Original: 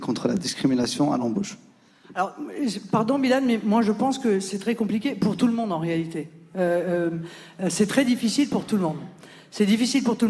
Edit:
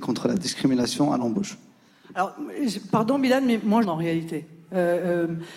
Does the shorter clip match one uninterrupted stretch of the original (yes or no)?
no